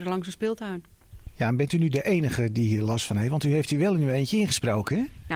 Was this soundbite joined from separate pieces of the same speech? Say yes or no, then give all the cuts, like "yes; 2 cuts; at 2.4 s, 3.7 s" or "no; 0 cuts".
no; 0 cuts